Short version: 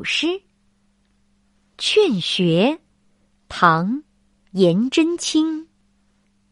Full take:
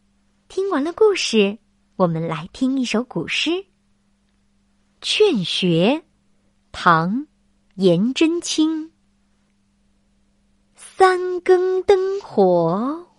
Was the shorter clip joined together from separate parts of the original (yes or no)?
no